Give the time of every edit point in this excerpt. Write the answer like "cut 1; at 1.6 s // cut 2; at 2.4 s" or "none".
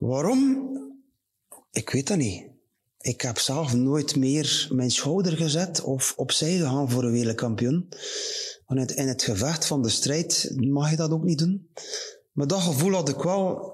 none

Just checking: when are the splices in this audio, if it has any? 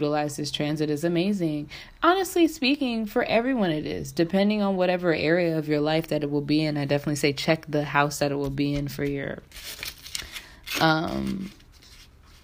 none

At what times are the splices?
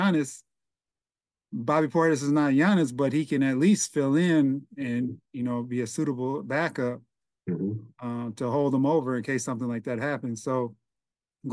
none

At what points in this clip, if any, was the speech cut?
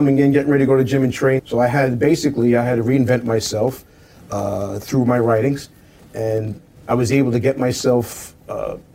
cut 1; at 1.4 s

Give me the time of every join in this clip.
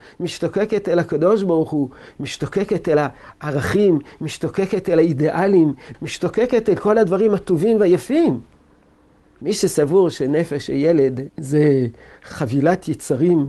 cut 1; at 5.9 s // cut 2; at 11.3 s

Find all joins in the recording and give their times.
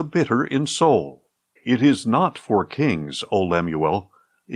cut 1; at 1.6 s

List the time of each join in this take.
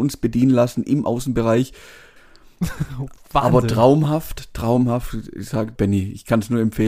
cut 1; at 2.2 s // cut 2; at 5.8 s

